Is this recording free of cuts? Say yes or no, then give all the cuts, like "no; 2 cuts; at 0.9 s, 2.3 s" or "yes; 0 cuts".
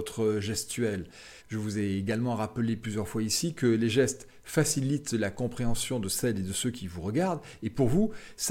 no; 1 cut; at 1.4 s